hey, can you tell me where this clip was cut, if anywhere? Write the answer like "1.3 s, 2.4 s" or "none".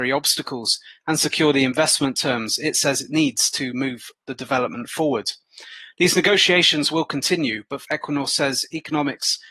7.8 s